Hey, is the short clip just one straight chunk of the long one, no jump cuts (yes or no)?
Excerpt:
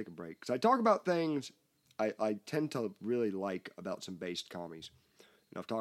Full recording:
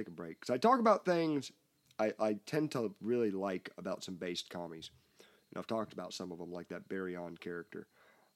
yes